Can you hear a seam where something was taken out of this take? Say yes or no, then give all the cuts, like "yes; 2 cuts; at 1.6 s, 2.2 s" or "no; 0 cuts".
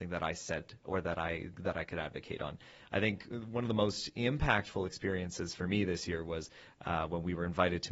no; 0 cuts